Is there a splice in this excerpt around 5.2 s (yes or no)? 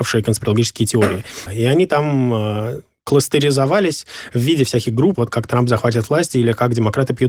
yes